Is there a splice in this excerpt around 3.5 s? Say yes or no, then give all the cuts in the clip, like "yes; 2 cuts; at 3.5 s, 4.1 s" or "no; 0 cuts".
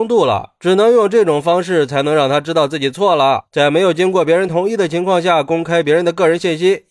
yes; 1 cut; at 3.5 s